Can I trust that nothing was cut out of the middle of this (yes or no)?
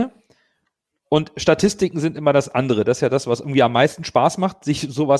yes